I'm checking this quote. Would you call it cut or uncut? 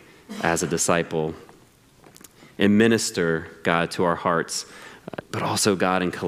cut